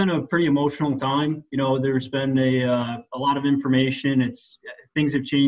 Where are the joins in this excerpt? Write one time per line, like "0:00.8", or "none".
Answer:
none